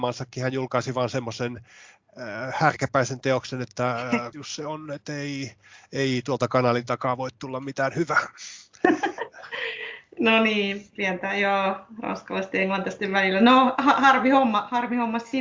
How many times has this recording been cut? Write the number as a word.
one